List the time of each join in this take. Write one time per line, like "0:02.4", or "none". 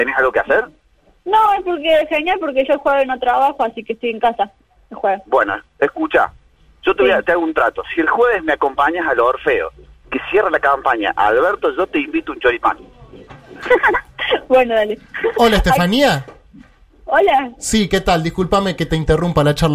none

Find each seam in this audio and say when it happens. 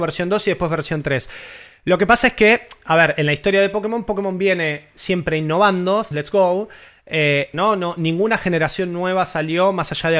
0:06.1
0:07.5

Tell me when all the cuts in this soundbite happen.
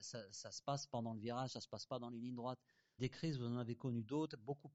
0:03.0

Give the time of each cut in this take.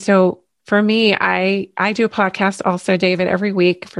none

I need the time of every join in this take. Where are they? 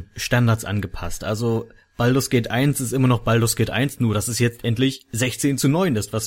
none

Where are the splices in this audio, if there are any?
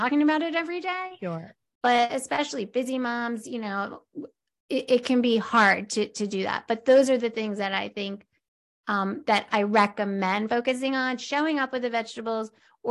none

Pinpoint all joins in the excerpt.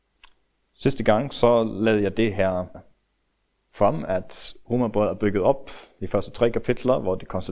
0:02.7

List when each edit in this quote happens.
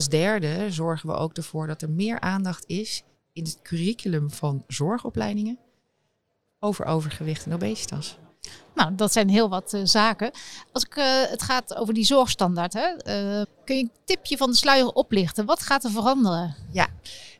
0:13.4

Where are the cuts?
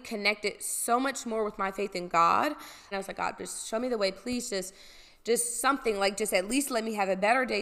0:02.9

